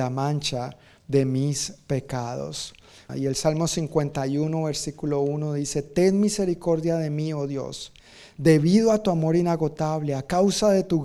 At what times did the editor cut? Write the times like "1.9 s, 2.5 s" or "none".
3.1 s